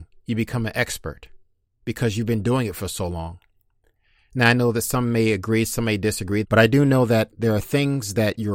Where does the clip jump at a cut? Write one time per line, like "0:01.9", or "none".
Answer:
0:06.4